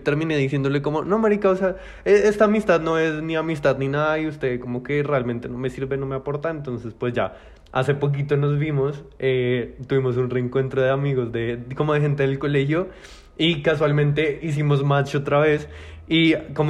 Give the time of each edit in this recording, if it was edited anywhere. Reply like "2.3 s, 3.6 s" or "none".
none